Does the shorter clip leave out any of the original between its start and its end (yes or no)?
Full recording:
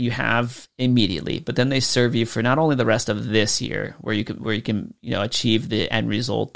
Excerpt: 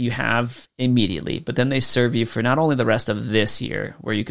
no